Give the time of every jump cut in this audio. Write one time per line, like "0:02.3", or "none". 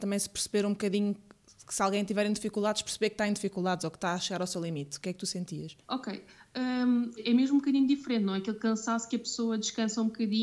0:05.8
0:07.2